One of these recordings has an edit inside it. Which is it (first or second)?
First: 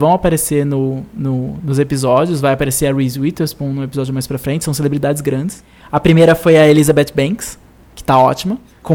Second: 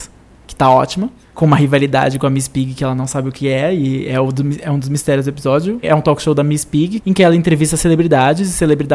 second